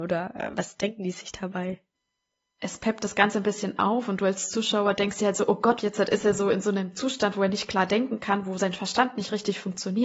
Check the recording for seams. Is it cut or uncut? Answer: cut